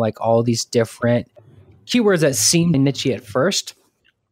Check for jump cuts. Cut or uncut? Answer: cut